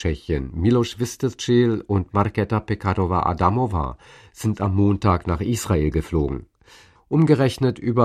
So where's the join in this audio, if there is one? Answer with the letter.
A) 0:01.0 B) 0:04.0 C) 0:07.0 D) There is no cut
C